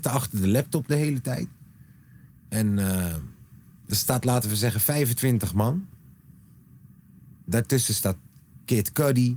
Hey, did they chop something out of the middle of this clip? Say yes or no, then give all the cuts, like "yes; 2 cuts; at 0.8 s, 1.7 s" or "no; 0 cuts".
no; 0 cuts